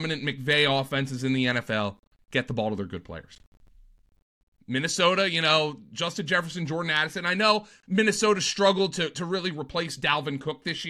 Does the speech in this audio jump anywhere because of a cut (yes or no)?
yes